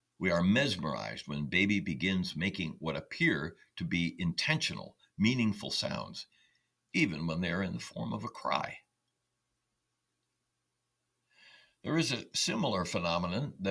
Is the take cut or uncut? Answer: uncut